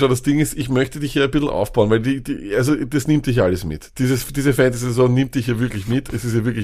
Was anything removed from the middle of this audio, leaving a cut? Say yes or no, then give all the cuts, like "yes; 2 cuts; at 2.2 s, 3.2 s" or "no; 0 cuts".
no; 0 cuts